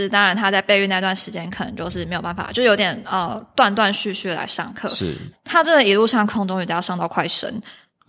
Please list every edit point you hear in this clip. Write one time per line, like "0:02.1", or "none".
0:05.3